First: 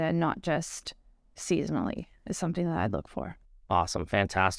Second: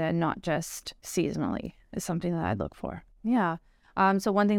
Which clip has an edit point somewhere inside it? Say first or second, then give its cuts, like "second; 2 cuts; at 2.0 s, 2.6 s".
second; 2 cuts; at 1.0 s, 3.2 s